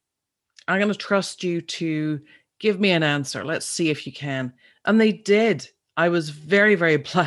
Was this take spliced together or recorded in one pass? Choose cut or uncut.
uncut